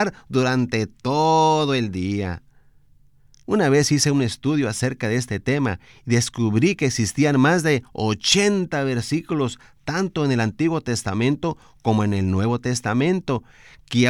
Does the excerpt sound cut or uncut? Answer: cut